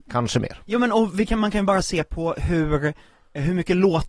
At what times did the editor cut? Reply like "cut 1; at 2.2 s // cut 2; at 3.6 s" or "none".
none